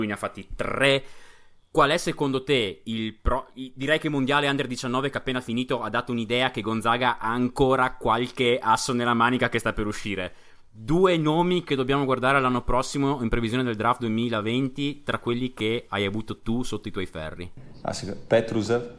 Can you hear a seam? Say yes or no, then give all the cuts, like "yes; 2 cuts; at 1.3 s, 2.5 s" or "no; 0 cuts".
no; 0 cuts